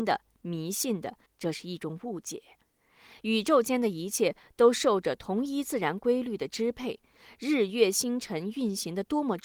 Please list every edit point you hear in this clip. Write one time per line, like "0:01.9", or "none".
0:01.3